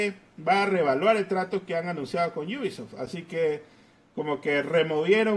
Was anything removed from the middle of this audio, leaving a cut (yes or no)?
no